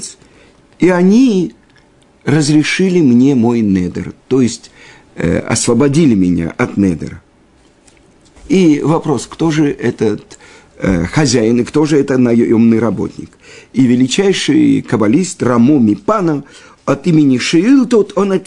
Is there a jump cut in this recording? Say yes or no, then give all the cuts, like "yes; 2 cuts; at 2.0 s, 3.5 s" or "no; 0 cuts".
yes; 1 cut; at 8.4 s